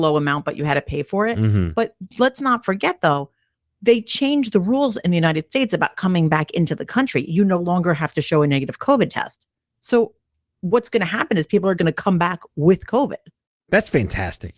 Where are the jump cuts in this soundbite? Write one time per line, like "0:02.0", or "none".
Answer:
0:11.8